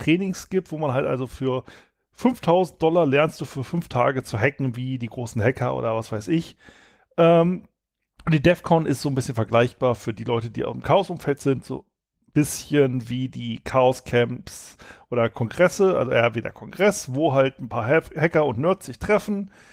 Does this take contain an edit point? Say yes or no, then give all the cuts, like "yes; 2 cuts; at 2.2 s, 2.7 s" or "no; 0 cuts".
no; 0 cuts